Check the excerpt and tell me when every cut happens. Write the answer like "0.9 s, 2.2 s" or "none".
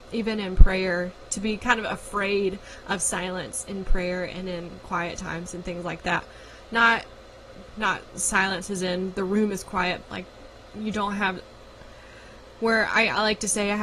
10.0 s